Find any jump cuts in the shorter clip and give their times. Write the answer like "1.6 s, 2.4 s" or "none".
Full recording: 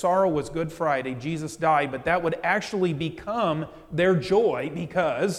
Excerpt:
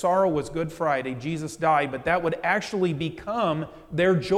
none